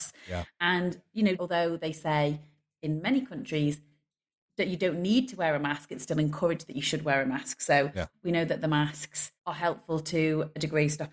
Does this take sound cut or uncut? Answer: cut